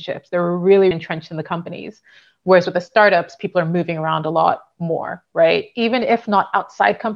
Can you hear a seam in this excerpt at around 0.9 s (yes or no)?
yes